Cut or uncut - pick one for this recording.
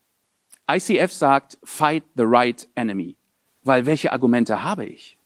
cut